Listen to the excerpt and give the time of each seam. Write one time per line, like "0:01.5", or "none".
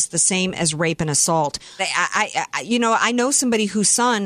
0:01.8